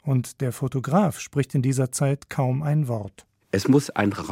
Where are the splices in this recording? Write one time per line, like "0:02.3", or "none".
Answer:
none